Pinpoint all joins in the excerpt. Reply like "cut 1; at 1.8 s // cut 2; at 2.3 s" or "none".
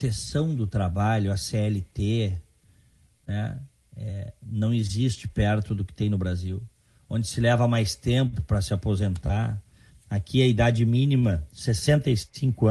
none